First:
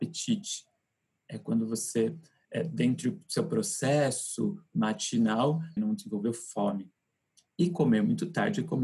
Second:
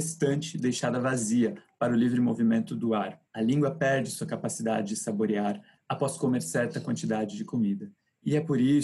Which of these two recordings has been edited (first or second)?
first